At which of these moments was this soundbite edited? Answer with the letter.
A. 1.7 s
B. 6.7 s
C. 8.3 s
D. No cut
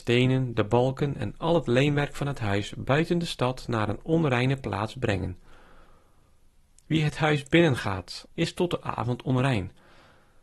C